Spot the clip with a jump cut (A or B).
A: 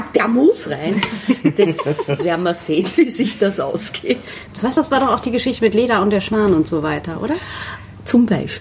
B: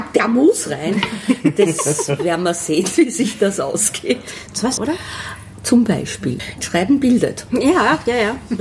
B